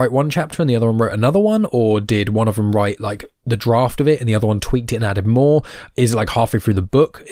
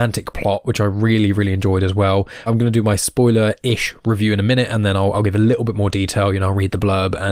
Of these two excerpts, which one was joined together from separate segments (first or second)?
second